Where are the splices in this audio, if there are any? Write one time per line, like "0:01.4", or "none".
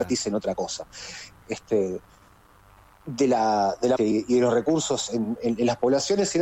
0:01.4
0:04.0